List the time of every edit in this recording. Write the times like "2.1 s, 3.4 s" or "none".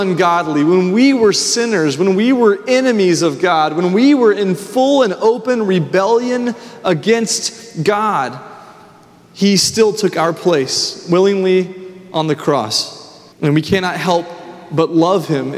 13.3 s